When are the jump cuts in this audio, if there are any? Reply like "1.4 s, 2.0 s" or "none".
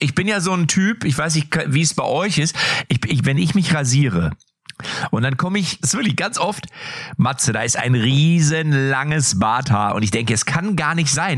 5.8 s